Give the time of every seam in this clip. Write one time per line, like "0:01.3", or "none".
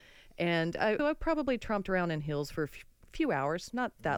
0:01.0